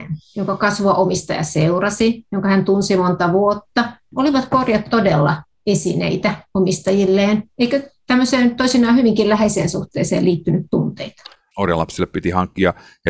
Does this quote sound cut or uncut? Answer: cut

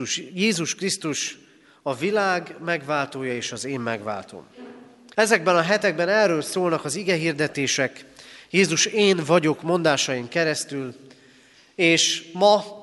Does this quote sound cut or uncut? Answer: cut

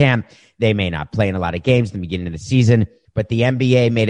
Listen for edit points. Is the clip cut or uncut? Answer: cut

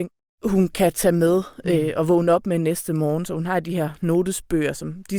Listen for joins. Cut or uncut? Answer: uncut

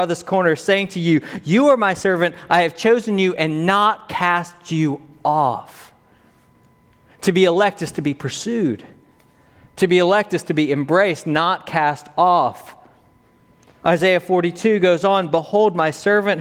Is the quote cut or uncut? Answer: uncut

